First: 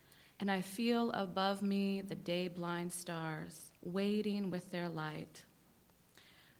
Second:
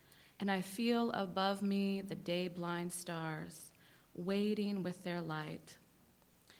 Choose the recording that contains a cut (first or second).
first